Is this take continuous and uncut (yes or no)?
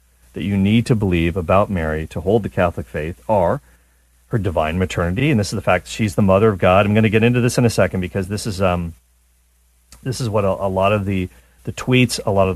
yes